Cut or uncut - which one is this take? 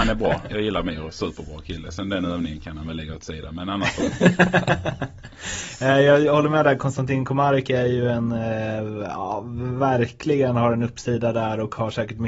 uncut